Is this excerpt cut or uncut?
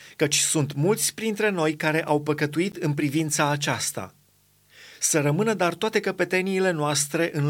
uncut